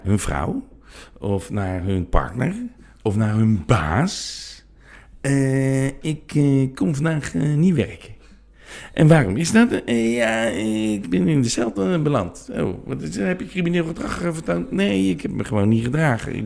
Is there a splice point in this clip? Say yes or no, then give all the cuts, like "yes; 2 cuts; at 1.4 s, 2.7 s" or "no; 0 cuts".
yes; 1 cut; at 11.0 s